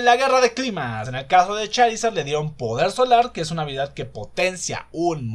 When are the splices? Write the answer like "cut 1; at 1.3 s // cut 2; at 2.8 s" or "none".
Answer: cut 1; at 1.1 s

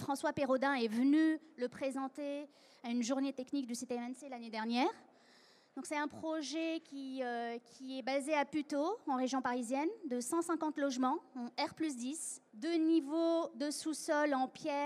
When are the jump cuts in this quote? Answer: cut 1; at 12.5 s

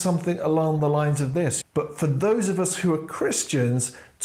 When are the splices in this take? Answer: cut 1; at 1.6 s

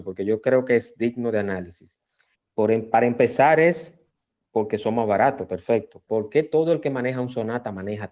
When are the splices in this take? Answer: cut 1; at 2.3 s // cut 2; at 6.1 s

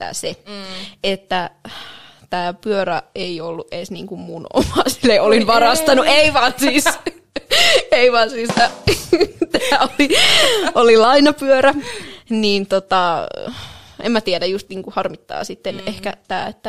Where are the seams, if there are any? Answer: none

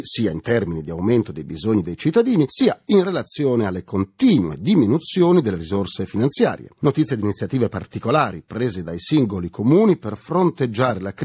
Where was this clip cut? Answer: none

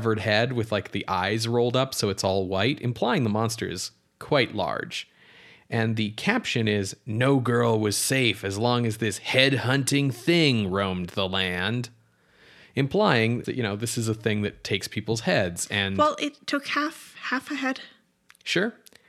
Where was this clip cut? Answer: cut 1; at 13.4 s

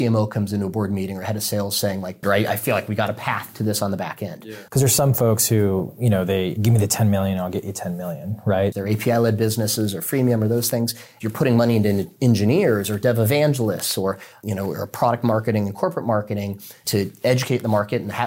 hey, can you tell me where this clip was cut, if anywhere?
cut 1; at 2.2 s // cut 2; at 4.7 s // cut 3; at 8.7 s

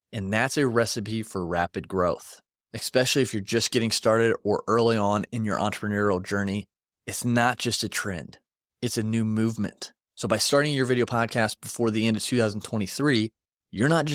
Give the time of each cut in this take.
cut 1; at 10.0 s

